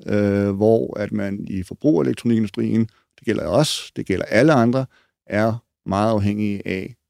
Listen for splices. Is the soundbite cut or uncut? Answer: uncut